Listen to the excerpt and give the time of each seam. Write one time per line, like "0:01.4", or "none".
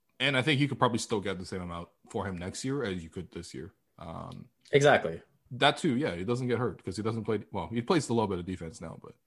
0:05.5